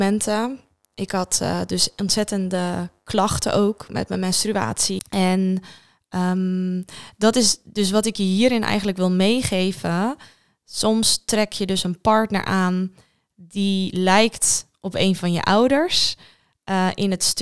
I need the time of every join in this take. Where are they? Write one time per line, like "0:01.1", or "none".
0:05.0